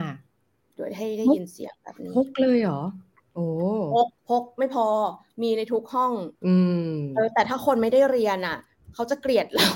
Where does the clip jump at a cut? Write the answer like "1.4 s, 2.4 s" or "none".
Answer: 4.2 s, 6.4 s